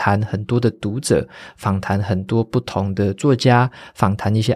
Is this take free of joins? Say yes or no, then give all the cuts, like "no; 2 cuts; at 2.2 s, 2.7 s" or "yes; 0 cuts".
yes; 0 cuts